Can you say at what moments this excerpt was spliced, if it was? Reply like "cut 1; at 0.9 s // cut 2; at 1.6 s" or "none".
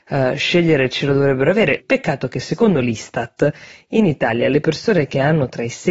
cut 1; at 1.8 s